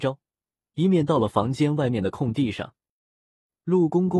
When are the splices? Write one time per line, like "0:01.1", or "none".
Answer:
none